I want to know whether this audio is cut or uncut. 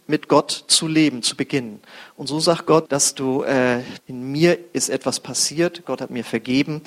cut